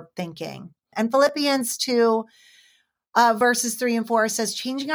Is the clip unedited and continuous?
no; 1 cut; at 0.9 s

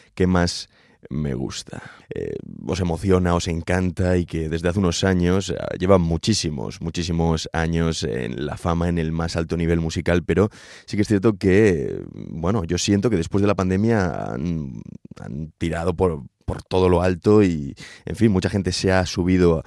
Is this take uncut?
no; 1 cut; at 2.0 s

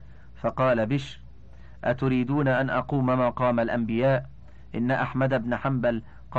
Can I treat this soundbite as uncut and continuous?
yes; 0 cuts

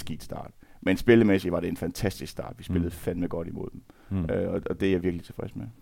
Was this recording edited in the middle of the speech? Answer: no; 0 cuts

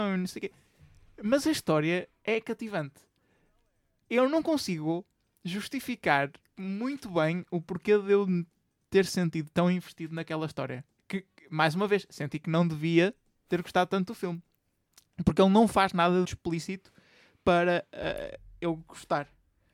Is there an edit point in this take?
yes; 2 cuts; at 11.0 s, 16.2 s

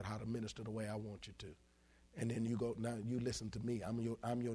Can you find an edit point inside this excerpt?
no; 0 cuts

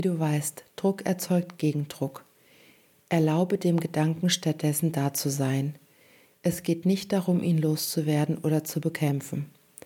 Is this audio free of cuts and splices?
yes; 0 cuts

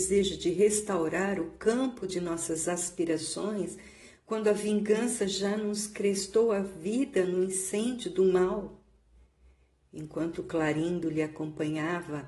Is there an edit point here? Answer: no; 0 cuts

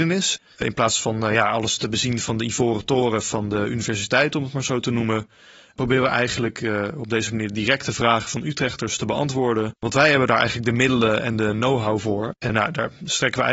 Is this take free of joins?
no; 1 cut; at 12.5 s

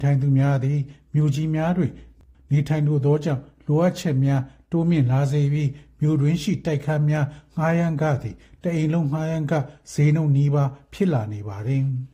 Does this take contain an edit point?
no; 0 cuts

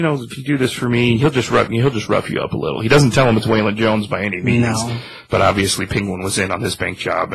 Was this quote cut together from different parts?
no; 0 cuts

